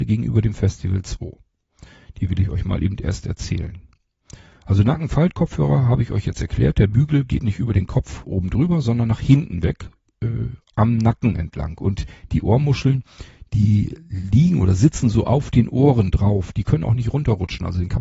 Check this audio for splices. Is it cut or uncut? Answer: uncut